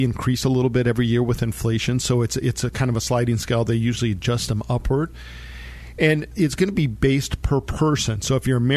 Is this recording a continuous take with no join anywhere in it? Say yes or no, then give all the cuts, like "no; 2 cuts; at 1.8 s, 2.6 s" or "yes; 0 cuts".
yes; 0 cuts